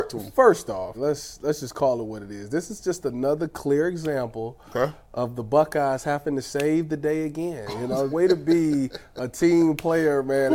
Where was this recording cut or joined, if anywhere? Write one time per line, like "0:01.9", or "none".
0:00.9
0:08.1